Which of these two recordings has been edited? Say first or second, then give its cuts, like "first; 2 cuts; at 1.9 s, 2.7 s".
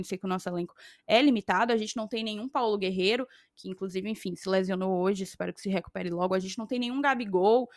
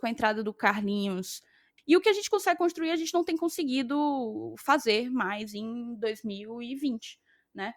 second; 1 cut; at 1.8 s